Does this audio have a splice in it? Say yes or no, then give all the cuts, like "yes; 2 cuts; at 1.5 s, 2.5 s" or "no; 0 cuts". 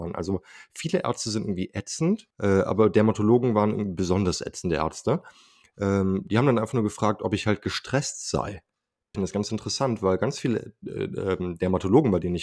yes; 2 cuts; at 2.3 s, 9.1 s